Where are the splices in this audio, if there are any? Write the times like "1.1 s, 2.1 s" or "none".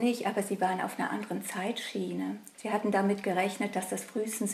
2.5 s